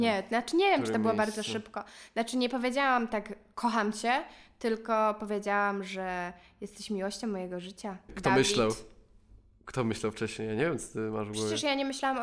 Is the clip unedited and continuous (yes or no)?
no